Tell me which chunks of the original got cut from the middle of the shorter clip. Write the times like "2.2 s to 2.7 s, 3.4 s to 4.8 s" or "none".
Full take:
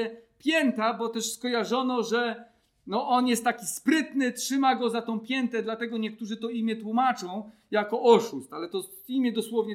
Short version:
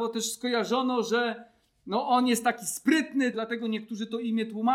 4.3 s to 5.6 s